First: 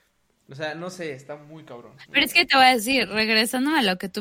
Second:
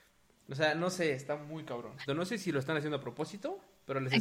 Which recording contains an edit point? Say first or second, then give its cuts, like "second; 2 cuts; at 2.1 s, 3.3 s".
second; 1 cut; at 2.1 s